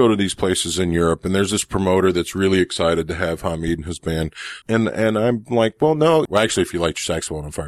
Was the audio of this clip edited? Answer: yes; 2 cuts; at 4.6 s, 6.3 s

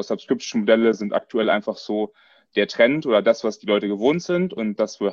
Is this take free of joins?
yes; 0 cuts

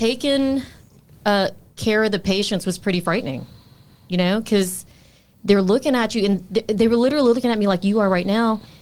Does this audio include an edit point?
no; 0 cuts

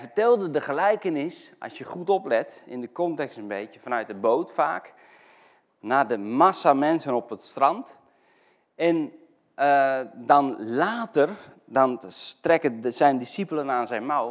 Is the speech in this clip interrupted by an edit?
no; 0 cuts

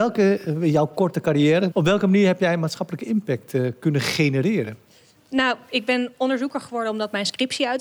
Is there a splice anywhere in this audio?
yes; 2 cuts; at 1.7 s, 5.2 s

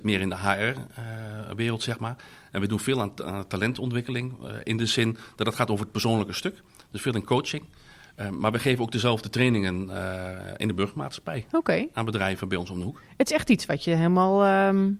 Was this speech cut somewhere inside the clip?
no; 0 cuts

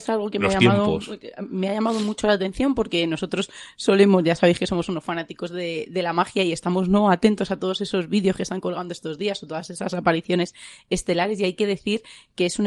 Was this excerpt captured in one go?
yes; 0 cuts

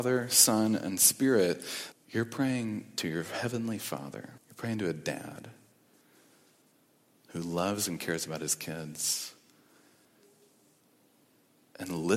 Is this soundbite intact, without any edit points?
no; 2 cuts; at 1.9 s, 4.4 s

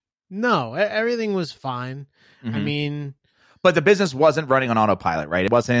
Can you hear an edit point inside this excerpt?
no; 0 cuts

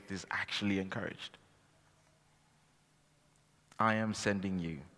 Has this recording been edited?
no; 0 cuts

